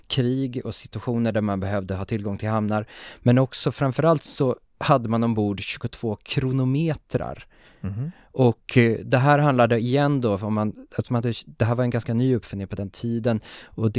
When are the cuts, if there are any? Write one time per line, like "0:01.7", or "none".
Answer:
none